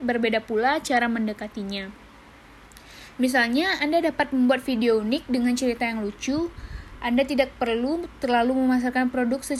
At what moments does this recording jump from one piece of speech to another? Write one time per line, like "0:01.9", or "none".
none